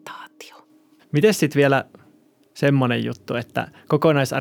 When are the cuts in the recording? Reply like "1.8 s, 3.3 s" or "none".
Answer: 1.0 s